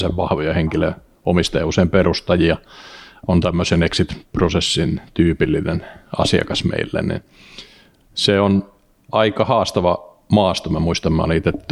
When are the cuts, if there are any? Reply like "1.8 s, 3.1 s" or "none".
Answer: none